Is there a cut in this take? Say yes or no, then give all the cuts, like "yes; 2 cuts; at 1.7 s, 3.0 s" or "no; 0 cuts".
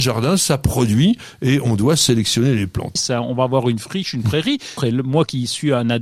yes; 2 cuts; at 3.0 s, 4.8 s